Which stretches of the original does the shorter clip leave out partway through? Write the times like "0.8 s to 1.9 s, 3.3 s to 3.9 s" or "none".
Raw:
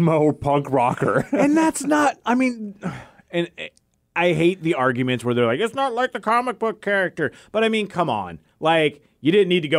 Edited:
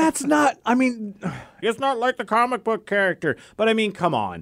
3.2 s to 5.6 s